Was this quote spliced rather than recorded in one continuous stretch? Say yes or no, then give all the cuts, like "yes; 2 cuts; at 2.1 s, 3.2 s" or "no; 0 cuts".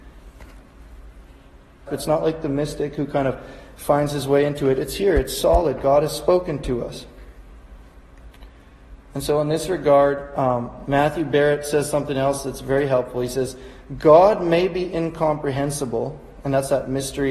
yes; 1 cut; at 1.9 s